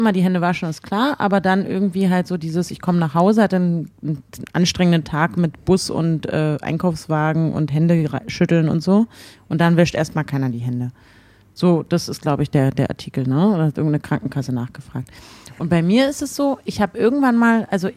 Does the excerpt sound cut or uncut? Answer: uncut